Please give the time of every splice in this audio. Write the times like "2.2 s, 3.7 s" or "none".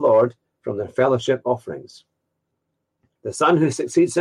3.2 s

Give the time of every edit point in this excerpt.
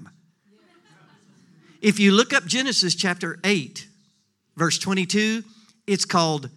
none

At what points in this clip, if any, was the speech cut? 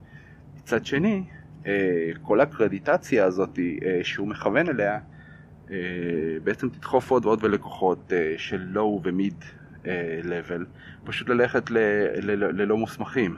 none

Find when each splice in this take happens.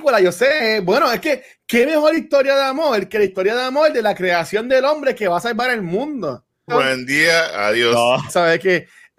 6.7 s, 8.3 s

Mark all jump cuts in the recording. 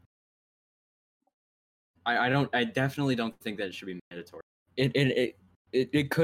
4.6 s

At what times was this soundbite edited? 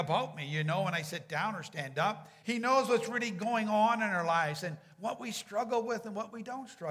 2.4 s

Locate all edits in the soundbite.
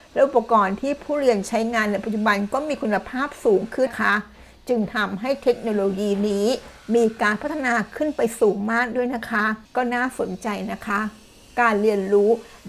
3.9 s, 9.7 s

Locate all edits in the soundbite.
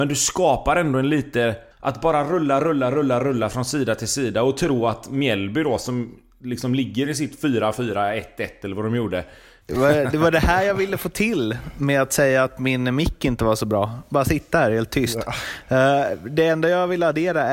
1.7 s, 9.6 s

